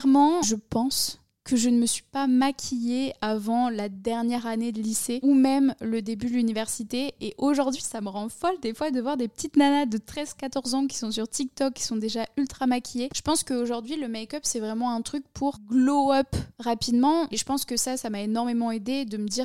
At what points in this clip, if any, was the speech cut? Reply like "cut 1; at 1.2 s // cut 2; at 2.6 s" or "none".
cut 1; at 13.1 s // cut 2; at 17.3 s